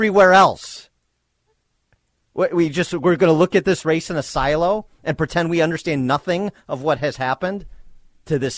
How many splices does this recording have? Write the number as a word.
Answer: zero